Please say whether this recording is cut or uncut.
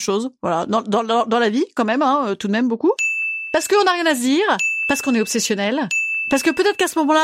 uncut